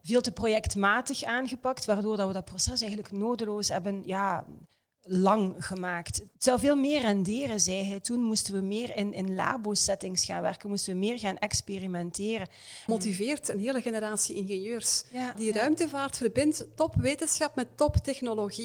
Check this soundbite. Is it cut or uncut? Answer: cut